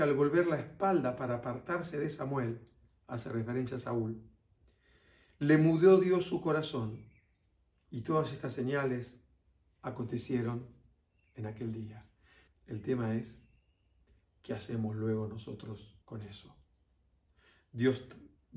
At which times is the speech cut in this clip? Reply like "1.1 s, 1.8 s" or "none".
12.5 s, 16.0 s